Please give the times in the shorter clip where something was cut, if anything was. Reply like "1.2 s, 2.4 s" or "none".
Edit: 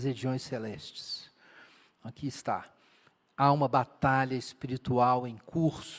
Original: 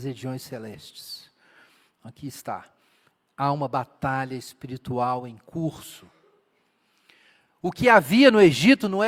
none